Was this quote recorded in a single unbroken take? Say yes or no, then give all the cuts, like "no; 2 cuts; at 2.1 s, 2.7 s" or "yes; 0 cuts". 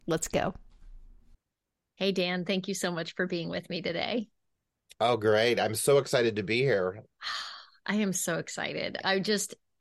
yes; 0 cuts